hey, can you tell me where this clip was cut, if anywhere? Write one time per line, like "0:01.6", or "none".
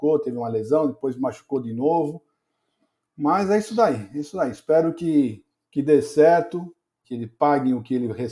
0:07.0